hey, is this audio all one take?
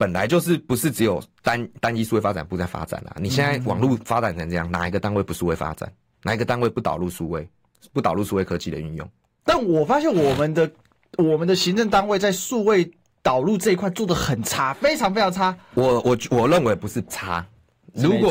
yes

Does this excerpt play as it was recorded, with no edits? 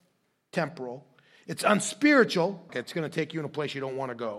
no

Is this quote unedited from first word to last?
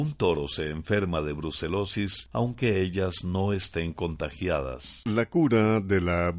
no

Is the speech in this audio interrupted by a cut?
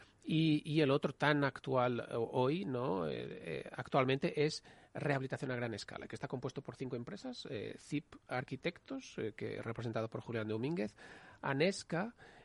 no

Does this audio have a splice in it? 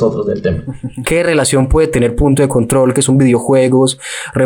yes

